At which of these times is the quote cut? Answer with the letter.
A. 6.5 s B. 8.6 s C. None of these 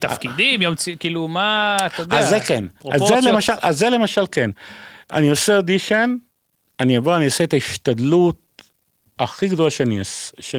C